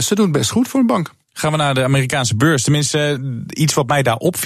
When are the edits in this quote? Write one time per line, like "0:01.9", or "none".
0:01.2